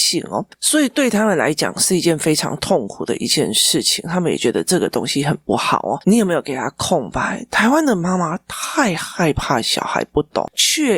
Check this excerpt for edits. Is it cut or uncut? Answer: cut